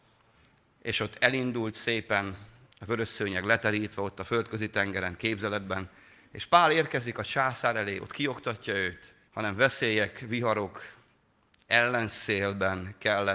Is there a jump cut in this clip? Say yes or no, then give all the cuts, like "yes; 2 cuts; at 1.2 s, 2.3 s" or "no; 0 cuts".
yes; 1 cut; at 9.3 s